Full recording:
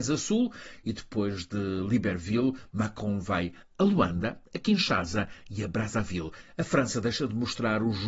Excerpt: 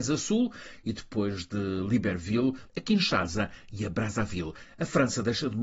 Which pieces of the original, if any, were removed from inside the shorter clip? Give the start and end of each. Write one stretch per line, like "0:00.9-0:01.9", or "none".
0:02.7-0:04.5